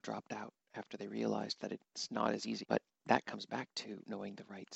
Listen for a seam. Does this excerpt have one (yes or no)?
yes